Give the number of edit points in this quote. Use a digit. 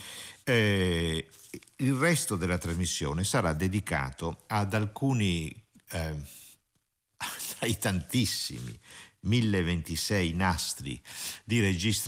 0